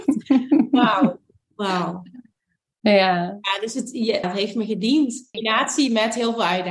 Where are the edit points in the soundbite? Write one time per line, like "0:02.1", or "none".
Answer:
0:04.2
0:05.3